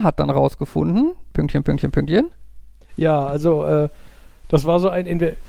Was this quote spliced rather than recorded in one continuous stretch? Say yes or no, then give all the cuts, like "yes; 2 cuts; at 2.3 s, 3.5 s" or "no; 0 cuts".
yes; 1 cut; at 2.8 s